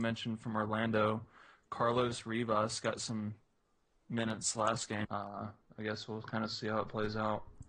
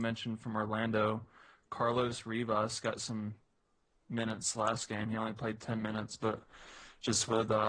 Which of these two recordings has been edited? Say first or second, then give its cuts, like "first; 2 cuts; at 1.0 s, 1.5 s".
first; 1 cut; at 5.0 s